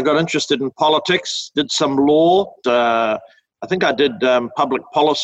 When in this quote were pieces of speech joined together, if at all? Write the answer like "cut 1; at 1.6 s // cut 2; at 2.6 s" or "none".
cut 1; at 2.6 s